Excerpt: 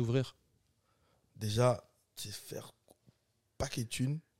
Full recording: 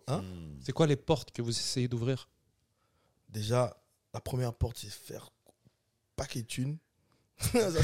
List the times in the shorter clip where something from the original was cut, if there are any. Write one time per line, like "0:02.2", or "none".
0:02.2

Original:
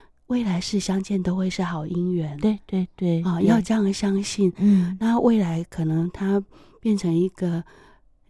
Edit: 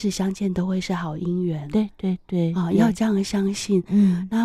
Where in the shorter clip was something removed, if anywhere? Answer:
none

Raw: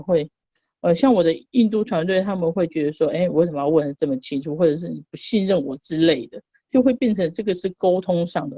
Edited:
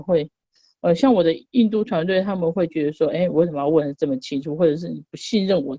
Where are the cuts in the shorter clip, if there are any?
none

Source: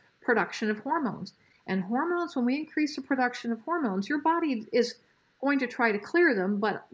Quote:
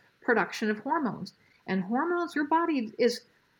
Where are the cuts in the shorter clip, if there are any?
0:02.3

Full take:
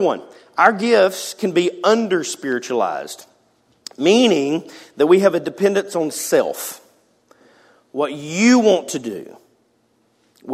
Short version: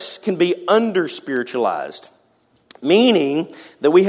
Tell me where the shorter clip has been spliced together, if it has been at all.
none

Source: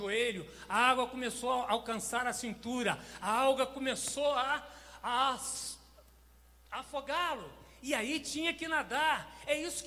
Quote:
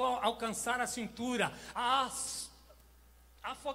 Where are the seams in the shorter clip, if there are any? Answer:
0:01.7

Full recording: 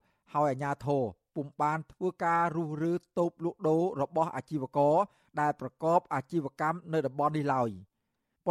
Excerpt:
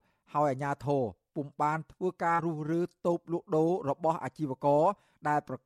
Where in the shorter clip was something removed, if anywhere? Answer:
0:02.4

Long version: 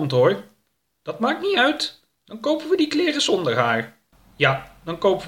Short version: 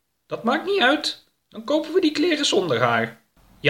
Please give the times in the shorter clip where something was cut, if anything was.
none

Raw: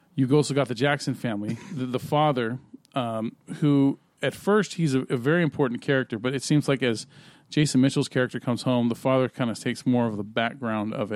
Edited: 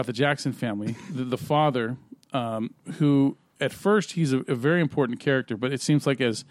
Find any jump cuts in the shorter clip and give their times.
none

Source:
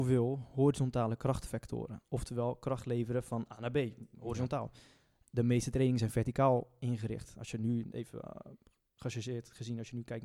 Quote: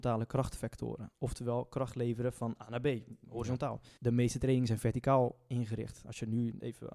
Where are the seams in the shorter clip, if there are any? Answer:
0:04.0

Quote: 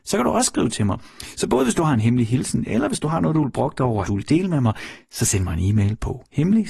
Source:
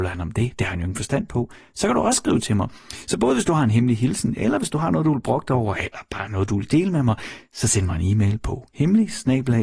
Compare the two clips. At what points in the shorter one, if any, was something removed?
0:04.0

